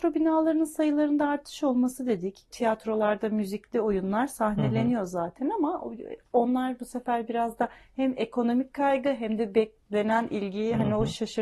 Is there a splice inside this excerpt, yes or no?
yes